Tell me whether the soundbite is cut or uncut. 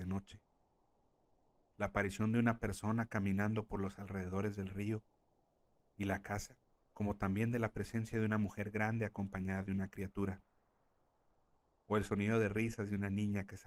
cut